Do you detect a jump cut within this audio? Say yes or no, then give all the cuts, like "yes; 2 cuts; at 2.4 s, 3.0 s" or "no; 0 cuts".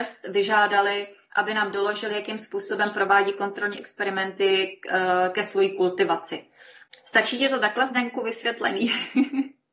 yes; 1 cut; at 6.9 s